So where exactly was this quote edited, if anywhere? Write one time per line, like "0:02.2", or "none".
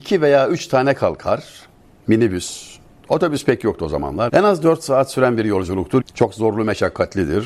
0:04.3
0:06.0